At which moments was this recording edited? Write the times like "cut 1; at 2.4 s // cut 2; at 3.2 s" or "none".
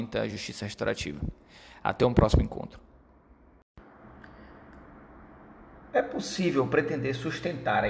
none